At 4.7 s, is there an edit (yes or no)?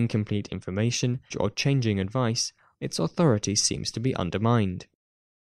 no